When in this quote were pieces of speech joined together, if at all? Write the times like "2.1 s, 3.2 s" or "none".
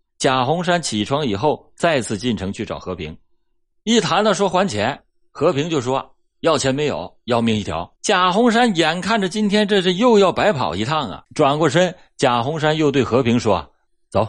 3.7 s, 8.0 s, 11.2 s